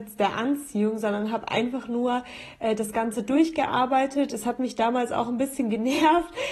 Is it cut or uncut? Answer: uncut